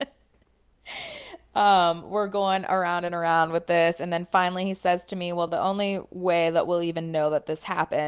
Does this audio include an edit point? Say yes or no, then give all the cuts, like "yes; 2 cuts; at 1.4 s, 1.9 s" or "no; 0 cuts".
no; 0 cuts